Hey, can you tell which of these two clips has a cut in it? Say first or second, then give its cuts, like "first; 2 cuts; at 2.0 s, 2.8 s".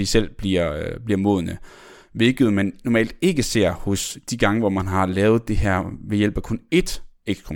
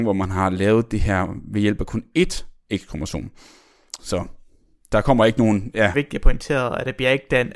second; 2 cuts; at 4.0 s, 5.9 s